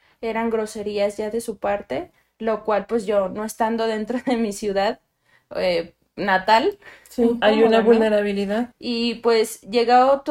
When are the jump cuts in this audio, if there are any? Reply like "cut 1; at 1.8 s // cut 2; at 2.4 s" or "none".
cut 1; at 7.4 s // cut 2; at 8.7 s

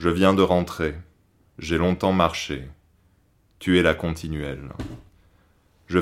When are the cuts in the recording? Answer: none

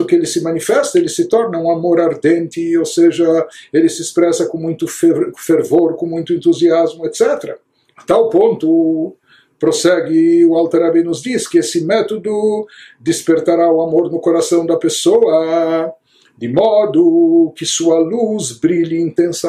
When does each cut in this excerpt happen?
none

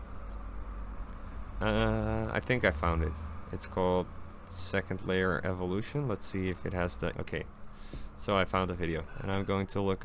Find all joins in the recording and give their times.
cut 1; at 7.1 s // cut 2; at 9.1 s

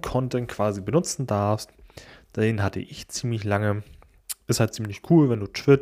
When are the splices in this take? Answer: none

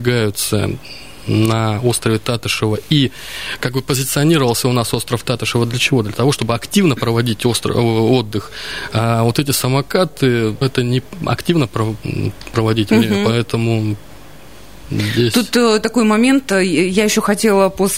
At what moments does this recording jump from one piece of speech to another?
cut 1; at 10.6 s

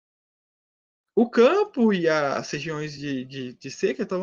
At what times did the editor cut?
none

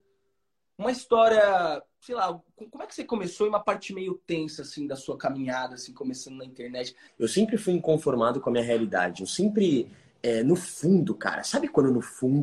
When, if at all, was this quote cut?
cut 1; at 7.1 s

